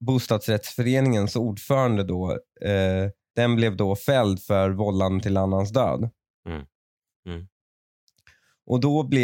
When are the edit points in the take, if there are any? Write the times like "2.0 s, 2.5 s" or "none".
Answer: 3.3 s, 7.1 s